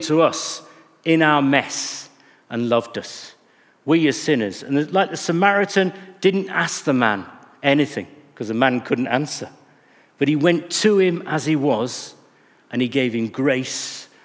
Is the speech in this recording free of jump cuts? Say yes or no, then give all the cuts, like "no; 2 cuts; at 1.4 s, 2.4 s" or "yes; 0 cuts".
yes; 0 cuts